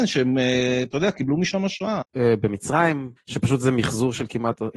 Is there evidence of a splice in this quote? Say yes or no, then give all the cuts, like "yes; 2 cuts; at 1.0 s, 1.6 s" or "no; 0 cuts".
yes; 2 cuts; at 2.0 s, 3.2 s